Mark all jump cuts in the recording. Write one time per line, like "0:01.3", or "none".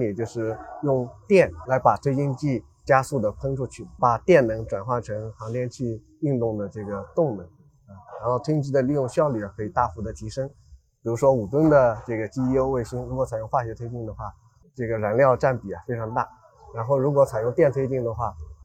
none